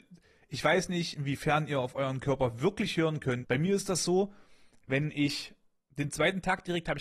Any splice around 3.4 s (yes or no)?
yes